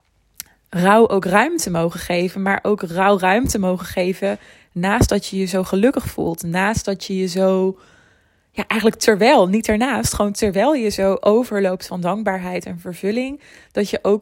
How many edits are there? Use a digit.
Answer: 0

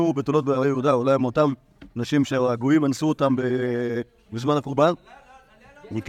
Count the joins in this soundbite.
0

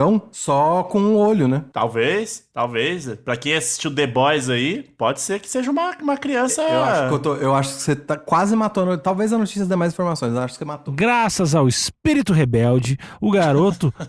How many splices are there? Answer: 0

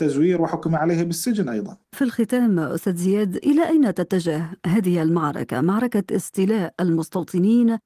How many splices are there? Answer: 1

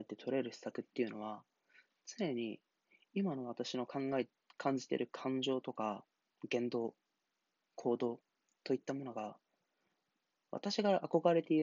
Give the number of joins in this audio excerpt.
0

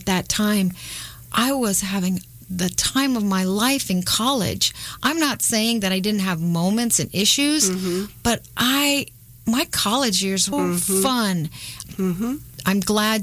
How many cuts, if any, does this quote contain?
2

